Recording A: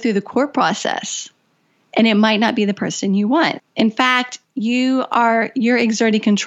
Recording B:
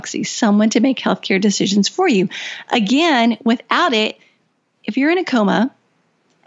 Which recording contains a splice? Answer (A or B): A